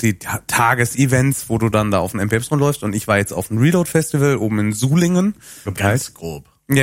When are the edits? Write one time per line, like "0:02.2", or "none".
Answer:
0:05.7